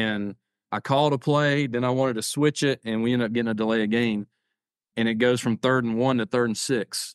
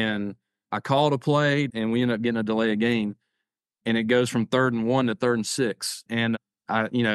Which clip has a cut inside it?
second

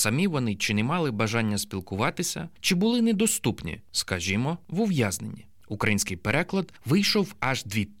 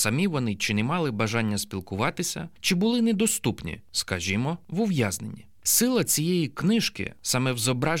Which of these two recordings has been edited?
first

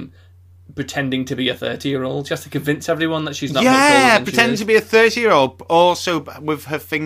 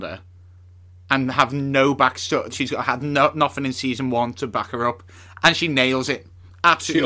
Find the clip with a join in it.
second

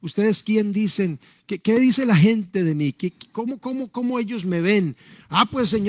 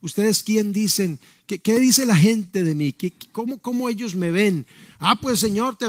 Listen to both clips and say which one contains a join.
second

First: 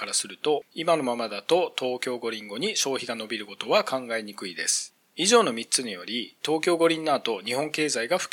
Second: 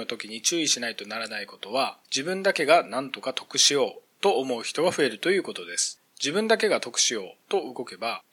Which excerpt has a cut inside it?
second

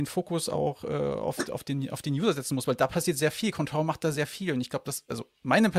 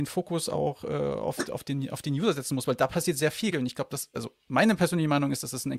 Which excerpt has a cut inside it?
second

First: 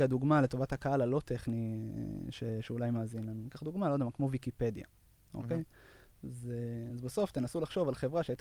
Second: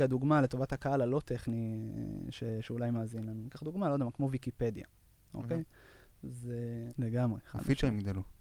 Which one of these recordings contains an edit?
second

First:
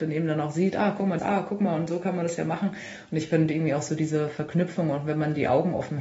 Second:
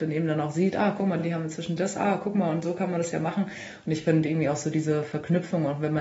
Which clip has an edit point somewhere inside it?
first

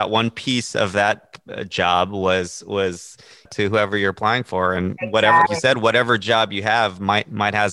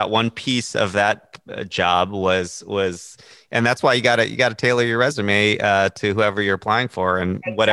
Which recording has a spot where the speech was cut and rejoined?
first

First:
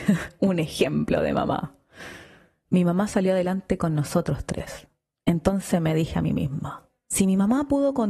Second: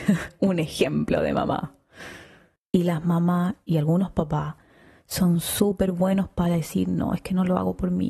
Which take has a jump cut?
second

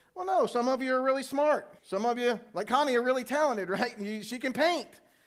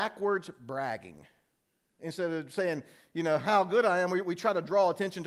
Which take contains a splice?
first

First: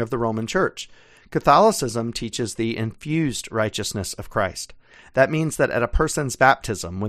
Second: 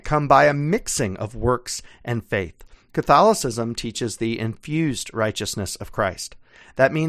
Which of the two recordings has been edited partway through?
second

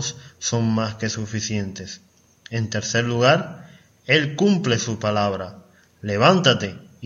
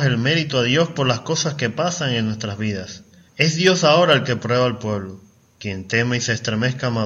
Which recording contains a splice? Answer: second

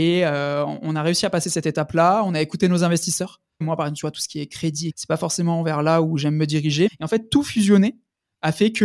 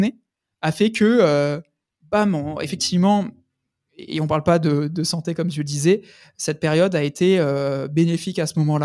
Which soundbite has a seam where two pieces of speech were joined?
first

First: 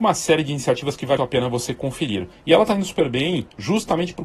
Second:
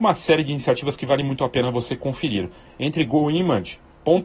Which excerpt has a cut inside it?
first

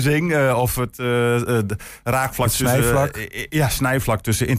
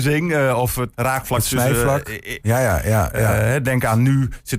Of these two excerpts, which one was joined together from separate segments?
second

